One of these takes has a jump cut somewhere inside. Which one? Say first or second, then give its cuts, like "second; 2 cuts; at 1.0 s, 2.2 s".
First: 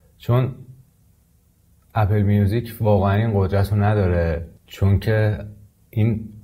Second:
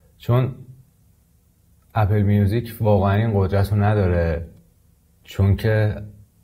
first; 1 cut; at 4.6 s